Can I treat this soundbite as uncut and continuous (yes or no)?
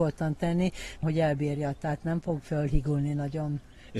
no